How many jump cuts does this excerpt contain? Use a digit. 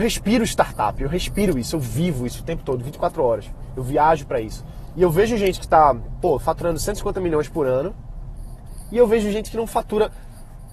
1